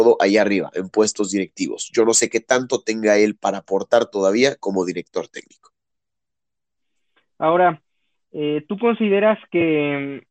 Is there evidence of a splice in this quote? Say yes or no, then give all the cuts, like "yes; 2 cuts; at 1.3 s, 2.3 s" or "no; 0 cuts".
no; 0 cuts